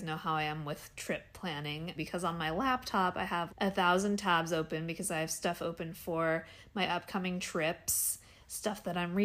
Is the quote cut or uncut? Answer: cut